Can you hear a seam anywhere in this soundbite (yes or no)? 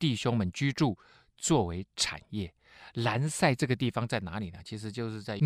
no